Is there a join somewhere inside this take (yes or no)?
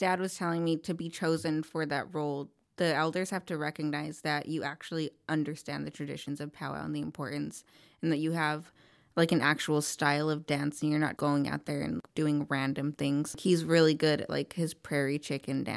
yes